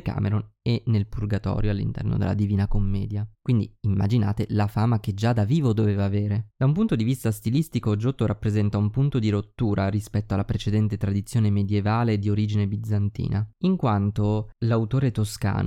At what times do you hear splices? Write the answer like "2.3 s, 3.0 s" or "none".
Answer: none